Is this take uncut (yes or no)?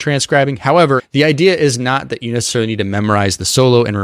no